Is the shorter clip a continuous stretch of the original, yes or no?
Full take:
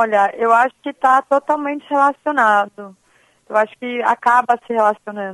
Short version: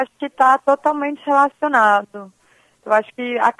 yes